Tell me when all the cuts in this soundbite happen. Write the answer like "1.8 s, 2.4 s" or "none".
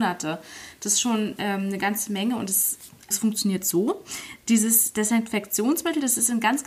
3.1 s